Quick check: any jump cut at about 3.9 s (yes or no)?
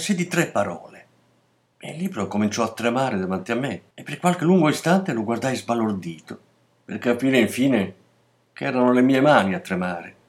yes